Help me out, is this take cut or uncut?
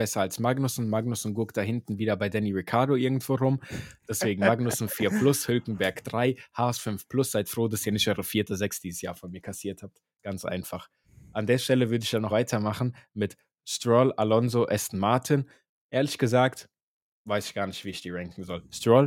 cut